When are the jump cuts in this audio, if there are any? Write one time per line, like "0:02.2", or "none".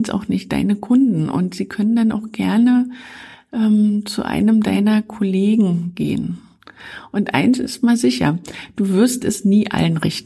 none